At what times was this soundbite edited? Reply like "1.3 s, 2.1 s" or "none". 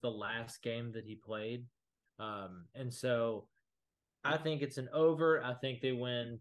2.1 s